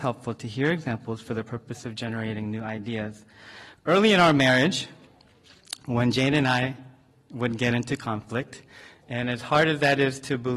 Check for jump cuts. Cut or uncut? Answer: uncut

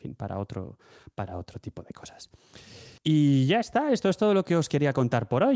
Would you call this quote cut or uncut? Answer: cut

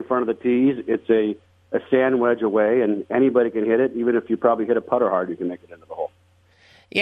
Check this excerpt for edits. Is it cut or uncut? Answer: uncut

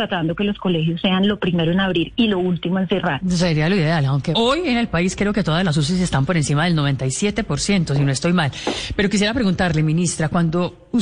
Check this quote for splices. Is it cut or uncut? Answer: cut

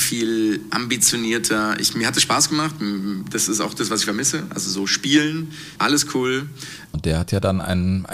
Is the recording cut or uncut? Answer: cut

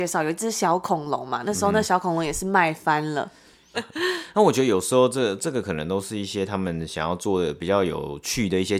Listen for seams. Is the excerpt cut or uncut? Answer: cut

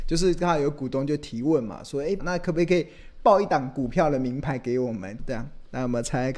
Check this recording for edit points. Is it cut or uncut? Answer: cut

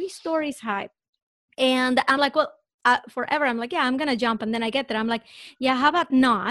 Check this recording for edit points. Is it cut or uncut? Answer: uncut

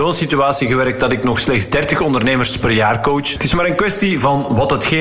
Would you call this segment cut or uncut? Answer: cut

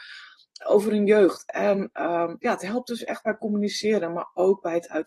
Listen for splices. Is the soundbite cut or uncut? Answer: uncut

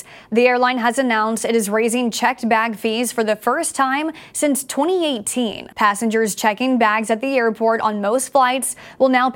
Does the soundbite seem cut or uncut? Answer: cut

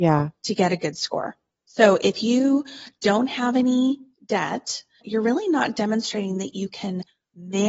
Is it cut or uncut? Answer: cut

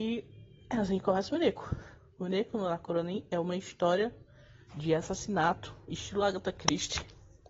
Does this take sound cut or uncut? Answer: uncut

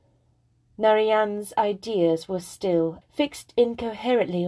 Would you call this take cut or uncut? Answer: cut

